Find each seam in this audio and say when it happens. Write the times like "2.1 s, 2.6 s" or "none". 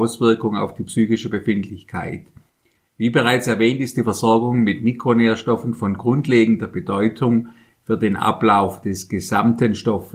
none